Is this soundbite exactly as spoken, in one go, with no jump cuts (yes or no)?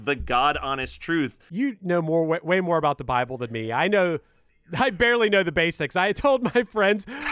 yes